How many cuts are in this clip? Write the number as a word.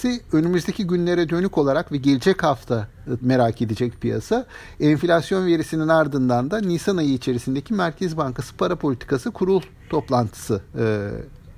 one